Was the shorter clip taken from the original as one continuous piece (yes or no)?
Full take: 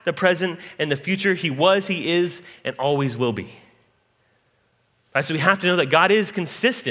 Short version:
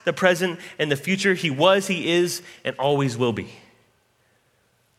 yes